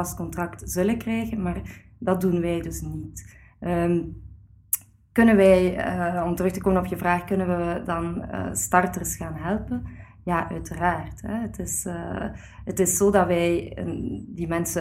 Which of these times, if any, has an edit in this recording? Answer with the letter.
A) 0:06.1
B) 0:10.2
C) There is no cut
C